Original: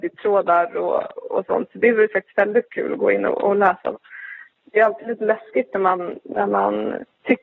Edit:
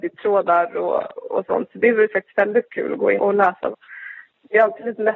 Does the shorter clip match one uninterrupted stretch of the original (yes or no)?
no